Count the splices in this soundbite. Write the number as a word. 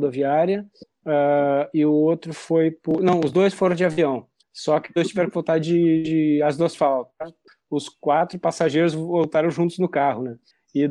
zero